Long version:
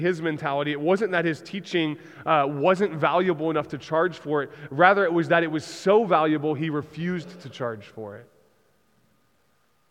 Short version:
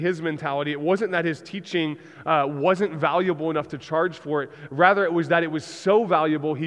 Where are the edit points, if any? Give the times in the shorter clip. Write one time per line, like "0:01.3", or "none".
none